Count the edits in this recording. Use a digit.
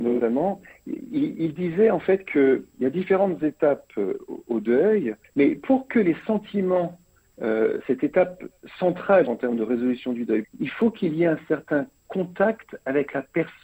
3